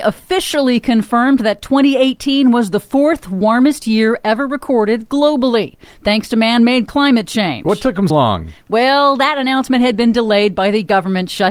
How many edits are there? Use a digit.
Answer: 1